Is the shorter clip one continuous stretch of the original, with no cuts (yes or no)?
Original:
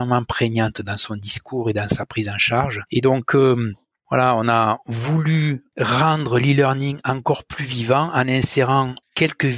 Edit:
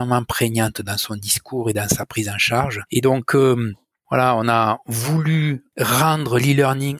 yes